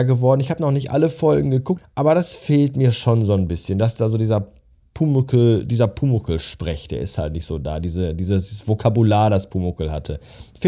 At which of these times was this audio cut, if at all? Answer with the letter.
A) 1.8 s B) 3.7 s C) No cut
A